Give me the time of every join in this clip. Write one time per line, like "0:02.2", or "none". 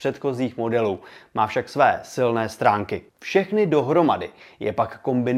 0:03.1